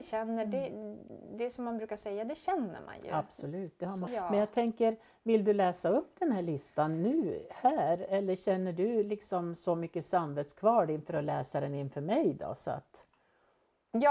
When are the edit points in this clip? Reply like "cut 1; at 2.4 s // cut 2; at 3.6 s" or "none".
cut 1; at 4.1 s